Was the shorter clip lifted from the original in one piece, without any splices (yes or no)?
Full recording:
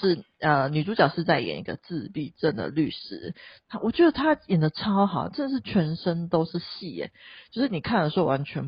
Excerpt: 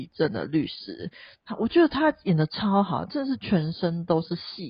yes